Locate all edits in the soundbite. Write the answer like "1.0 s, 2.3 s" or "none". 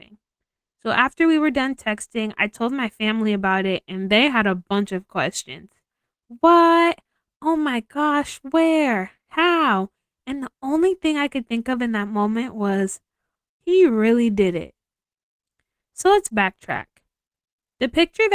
13.6 s